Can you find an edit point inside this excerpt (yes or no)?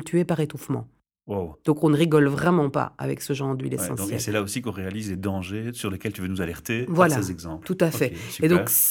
no